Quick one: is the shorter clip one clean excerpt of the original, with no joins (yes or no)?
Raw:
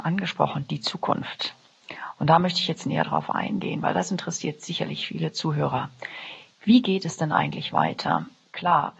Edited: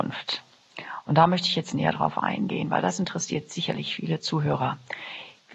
yes